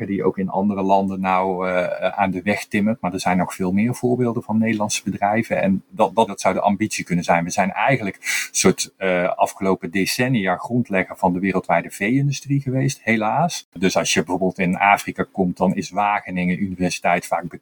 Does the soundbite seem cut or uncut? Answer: cut